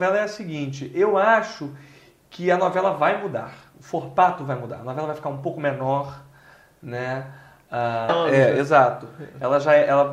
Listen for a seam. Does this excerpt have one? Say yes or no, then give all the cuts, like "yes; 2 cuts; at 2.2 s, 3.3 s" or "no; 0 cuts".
yes; 1 cut; at 8.1 s